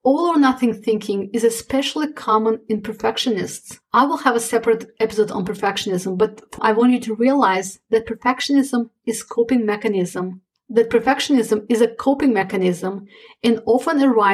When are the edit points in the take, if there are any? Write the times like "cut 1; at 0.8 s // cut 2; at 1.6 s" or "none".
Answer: cut 1; at 6.6 s